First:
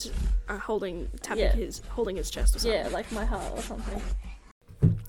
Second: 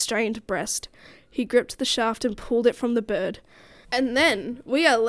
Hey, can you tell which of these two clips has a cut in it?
second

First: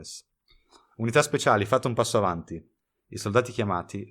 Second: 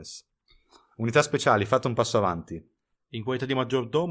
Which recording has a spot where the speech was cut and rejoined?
second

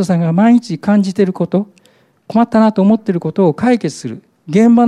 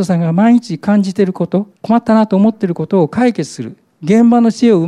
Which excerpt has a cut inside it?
second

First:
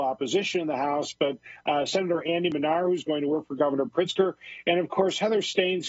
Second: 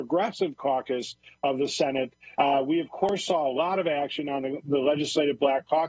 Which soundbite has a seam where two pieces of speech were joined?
second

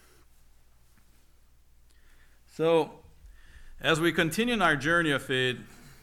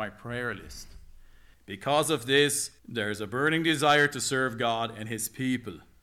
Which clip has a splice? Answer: second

